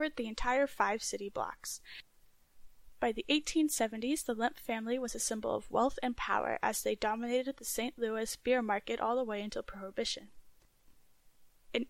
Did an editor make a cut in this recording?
no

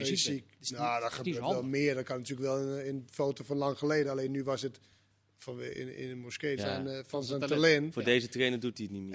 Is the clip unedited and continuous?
no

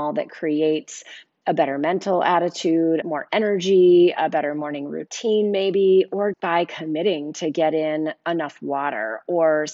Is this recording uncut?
no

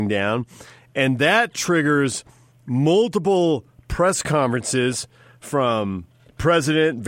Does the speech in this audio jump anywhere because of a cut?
no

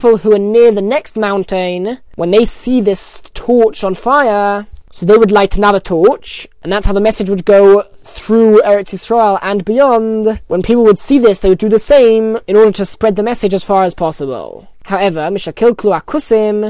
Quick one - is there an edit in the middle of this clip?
no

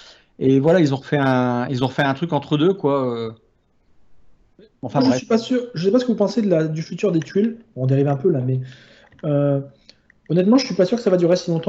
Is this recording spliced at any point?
no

